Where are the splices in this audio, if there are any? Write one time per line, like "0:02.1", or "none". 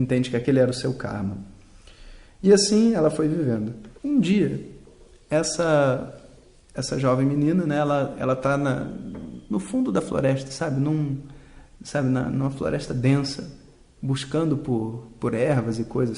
0:04.0